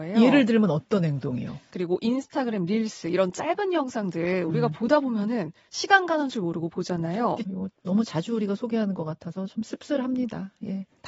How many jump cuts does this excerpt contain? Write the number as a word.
two